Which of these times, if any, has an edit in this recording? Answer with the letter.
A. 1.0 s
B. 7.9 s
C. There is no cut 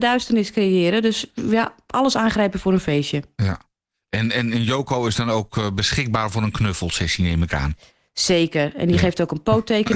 C